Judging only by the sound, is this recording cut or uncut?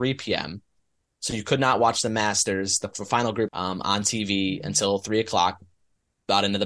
cut